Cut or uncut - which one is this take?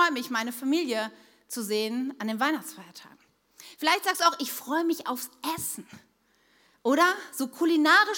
uncut